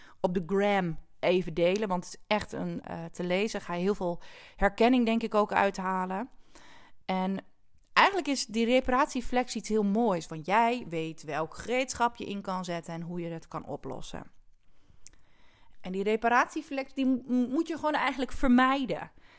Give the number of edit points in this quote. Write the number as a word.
three